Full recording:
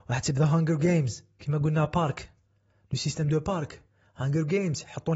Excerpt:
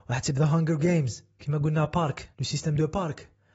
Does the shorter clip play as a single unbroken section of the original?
no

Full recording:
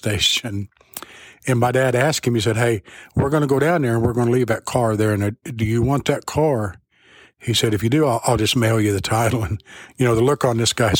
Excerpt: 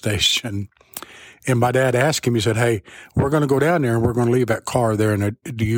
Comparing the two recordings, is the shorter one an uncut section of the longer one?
yes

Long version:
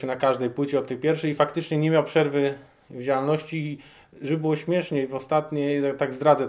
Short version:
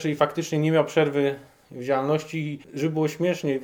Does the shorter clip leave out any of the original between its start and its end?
yes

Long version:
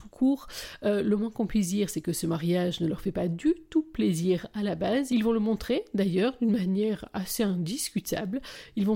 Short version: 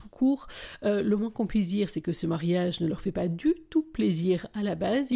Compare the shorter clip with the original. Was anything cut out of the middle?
no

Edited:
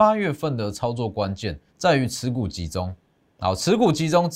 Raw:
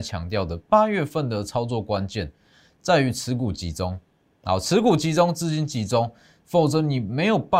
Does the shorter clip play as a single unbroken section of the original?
no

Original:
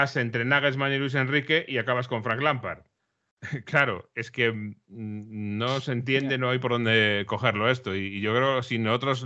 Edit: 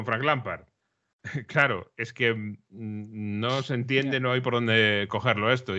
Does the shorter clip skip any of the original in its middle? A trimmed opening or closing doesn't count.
no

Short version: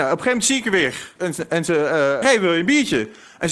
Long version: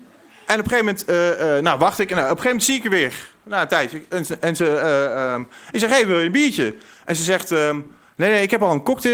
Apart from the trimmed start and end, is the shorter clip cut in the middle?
yes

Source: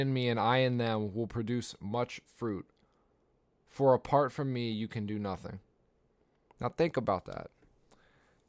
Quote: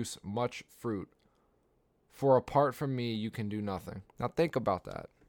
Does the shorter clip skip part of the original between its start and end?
yes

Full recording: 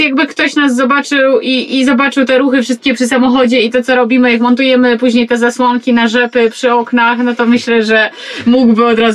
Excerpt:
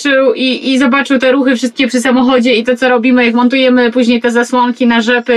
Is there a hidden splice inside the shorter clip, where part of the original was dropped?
no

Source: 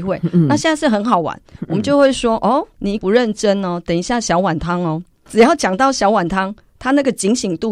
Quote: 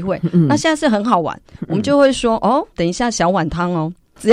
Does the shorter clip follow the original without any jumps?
no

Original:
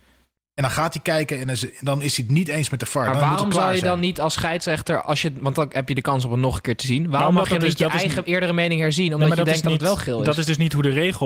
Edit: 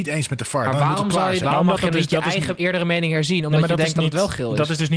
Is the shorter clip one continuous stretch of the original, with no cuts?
no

